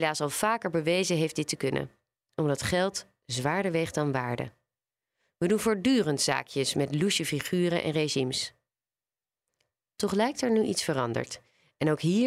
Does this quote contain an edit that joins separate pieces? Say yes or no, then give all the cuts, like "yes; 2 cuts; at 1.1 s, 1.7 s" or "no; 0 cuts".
no; 0 cuts